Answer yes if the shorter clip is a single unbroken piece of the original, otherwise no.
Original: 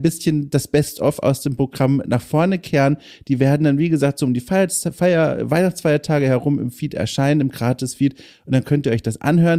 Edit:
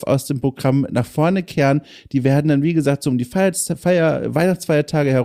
yes